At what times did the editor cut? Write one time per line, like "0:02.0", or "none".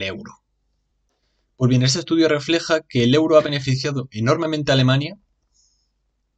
none